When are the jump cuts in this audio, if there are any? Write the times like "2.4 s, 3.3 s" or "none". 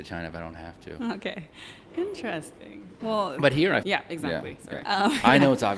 3.8 s, 4.8 s